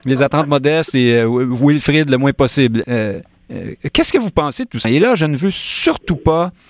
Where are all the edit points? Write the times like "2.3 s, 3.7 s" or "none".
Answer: 2.8 s, 4.8 s

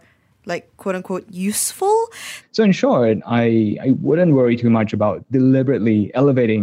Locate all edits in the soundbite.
2.4 s

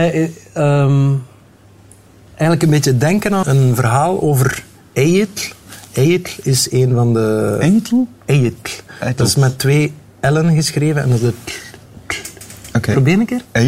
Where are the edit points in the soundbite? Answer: 3.4 s

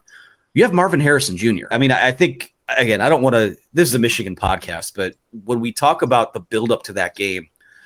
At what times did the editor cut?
1.7 s

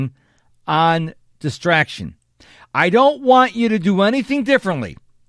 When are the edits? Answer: none

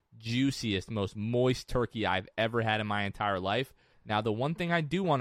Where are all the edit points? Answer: 3.9 s

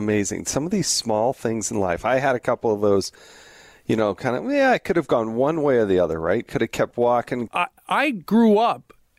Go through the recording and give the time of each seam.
7.5 s

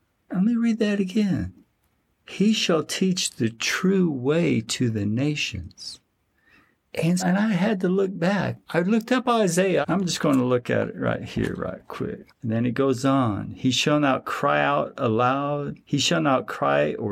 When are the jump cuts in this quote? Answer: 7.2 s, 9.8 s, 12.3 s

